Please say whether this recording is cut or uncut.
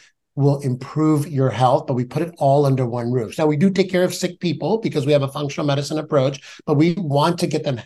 cut